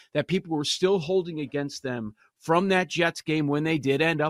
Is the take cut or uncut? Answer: uncut